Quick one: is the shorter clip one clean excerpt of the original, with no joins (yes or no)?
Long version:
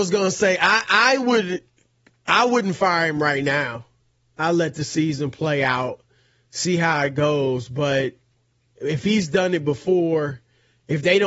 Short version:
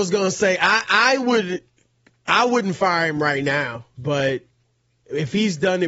no